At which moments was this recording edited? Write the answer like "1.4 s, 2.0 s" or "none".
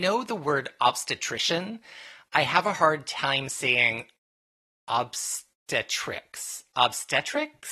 none